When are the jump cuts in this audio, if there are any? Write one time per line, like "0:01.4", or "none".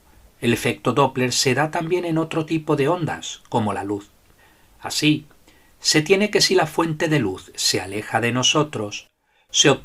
none